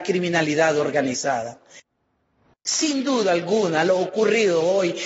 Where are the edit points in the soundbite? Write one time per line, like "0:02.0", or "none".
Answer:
0:02.5